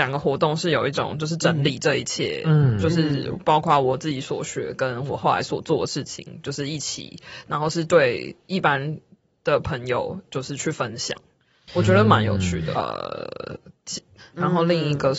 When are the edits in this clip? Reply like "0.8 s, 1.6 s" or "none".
12.7 s, 14.2 s